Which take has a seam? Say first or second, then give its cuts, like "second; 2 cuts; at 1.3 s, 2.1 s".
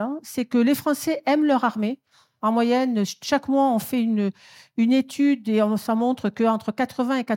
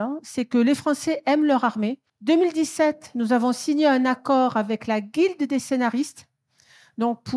second; 1 cut; at 2.1 s